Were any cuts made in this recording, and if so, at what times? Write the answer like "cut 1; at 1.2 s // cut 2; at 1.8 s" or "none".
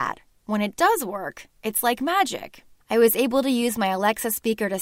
cut 1; at 2.8 s

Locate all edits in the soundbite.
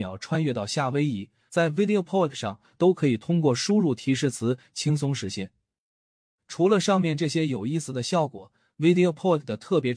cut 1; at 1.5 s

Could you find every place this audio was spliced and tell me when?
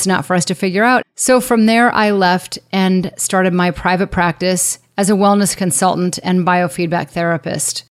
cut 1; at 1.0 s

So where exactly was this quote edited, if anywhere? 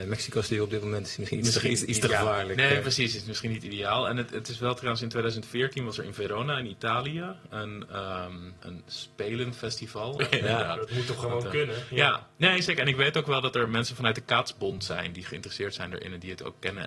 cut 1; at 8.6 s // cut 2; at 10.2 s

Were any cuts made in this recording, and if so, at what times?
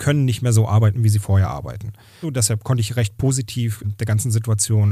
cut 1; at 2.2 s // cut 2; at 3.8 s

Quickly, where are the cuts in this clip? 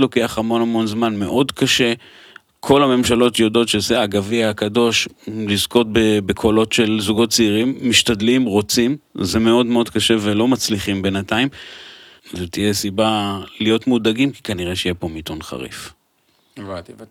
cut 1; at 12.2 s

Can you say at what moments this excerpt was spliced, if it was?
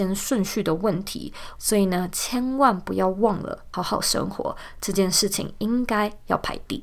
cut 1; at 1.6 s // cut 2; at 3.7 s

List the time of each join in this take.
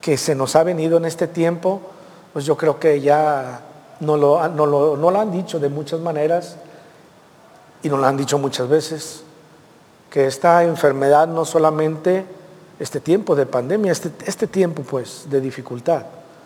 none

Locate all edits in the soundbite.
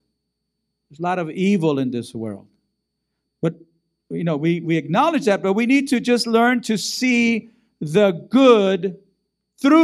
none

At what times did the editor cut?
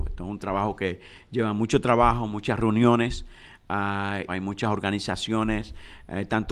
cut 1; at 4.3 s

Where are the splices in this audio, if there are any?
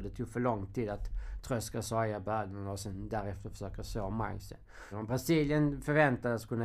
cut 1; at 4.9 s

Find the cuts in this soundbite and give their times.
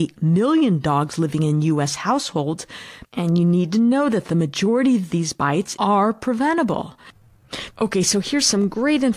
cut 1; at 3.0 s // cut 2; at 5.8 s // cut 3; at 7.7 s

